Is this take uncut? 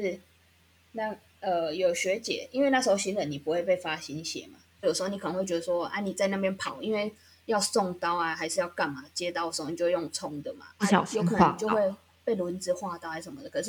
no; 1 cut; at 4.8 s

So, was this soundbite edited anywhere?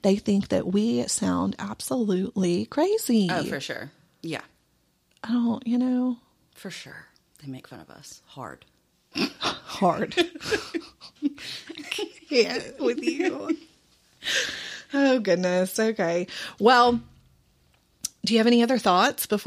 no; 0 cuts

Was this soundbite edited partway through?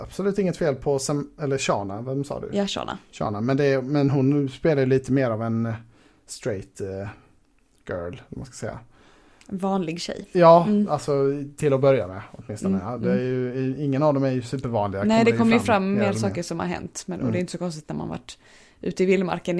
no; 0 cuts

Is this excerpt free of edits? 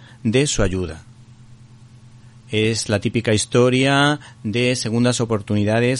yes; 0 cuts

